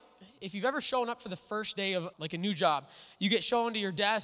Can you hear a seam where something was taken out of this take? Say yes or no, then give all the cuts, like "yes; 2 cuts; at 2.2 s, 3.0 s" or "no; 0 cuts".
yes; 1 cut; at 2.1 s